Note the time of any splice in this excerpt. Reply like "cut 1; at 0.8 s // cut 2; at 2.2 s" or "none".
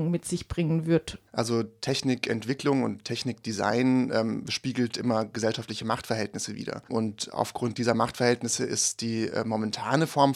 cut 1; at 1.3 s